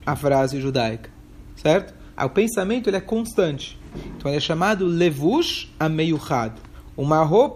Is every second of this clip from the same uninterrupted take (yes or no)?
no